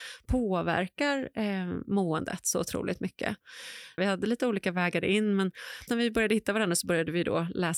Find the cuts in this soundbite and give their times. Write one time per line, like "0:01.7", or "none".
0:04.0
0:05.9

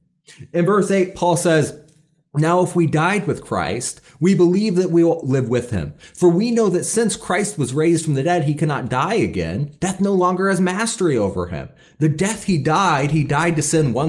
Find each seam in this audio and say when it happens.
0:05.2

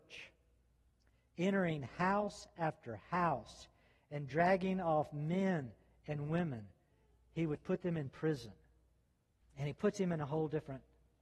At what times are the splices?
0:09.4

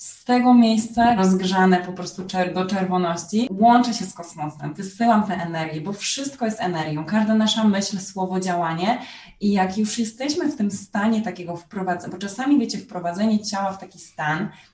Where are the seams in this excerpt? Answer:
0:01.2

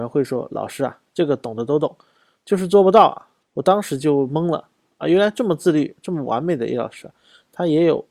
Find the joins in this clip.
0:03.4

